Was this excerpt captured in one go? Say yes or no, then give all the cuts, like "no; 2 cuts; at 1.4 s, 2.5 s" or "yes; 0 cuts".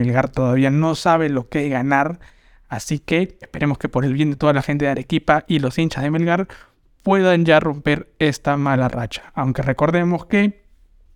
no; 1 cut; at 3.4 s